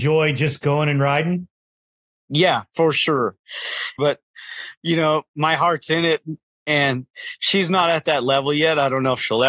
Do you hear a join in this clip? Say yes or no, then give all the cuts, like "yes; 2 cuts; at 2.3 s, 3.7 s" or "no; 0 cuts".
yes; 2 cuts; at 4.0 s, 6.5 s